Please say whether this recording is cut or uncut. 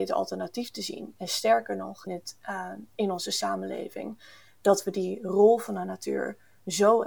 cut